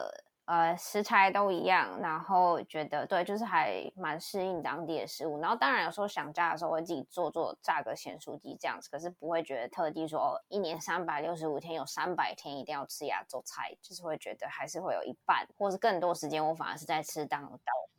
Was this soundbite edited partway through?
no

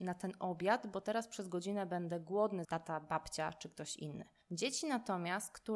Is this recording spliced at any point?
yes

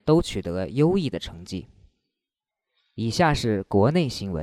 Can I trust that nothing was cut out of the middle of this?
yes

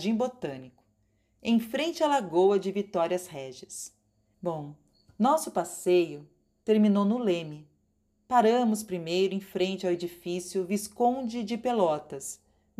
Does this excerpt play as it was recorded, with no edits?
no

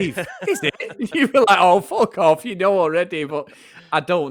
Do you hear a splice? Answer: no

